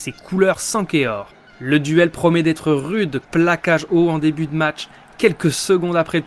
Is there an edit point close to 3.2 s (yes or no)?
yes